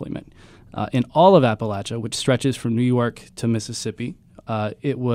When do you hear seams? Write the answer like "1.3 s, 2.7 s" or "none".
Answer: none